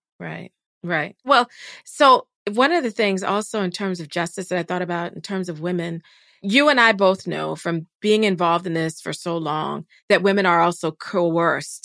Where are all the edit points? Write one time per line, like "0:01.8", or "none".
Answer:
none